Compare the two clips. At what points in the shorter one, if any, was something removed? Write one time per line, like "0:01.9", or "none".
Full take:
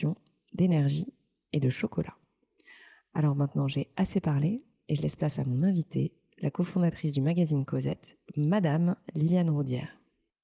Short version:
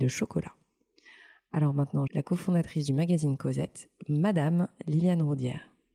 0:02.1

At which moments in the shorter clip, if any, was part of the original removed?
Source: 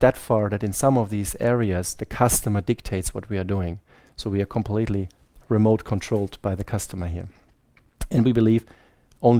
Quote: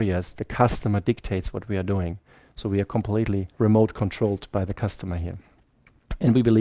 0:03.5

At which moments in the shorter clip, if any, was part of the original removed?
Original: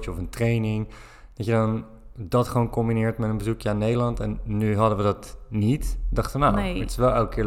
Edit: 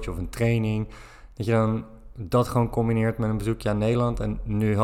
none

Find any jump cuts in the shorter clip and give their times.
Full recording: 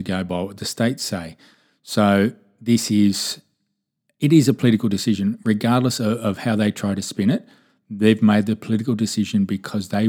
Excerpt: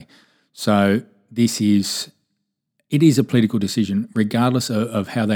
none

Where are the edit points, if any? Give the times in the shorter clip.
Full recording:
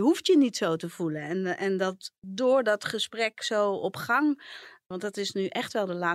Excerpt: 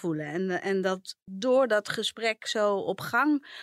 none

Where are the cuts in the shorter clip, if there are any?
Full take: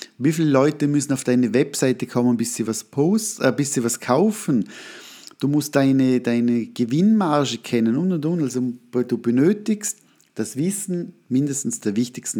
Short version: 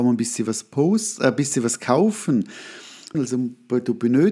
0:03.1

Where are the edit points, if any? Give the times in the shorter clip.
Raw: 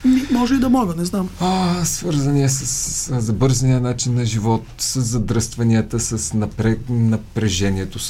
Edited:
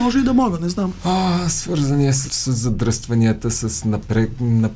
0:02.3

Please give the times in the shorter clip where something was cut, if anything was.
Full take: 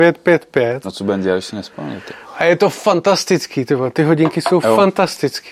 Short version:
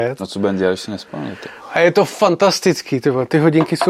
none

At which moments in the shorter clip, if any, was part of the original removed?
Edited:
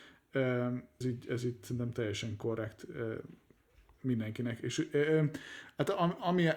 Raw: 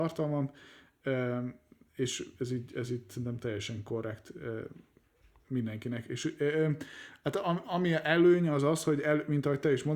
0:01.0

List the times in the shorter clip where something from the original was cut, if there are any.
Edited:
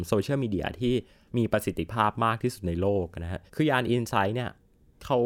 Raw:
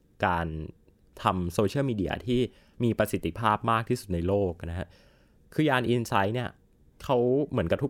0:03.5

